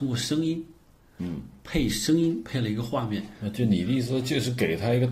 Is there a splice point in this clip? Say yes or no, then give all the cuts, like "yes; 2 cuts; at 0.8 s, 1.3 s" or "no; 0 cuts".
no; 0 cuts